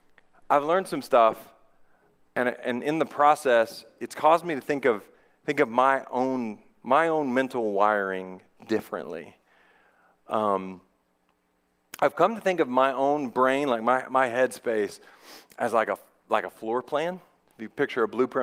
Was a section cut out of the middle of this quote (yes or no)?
no